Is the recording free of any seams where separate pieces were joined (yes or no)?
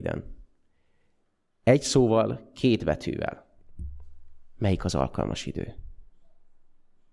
yes